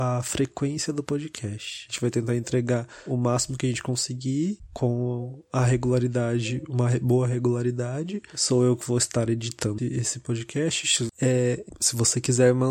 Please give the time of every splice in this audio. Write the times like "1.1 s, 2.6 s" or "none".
9.8 s, 11.1 s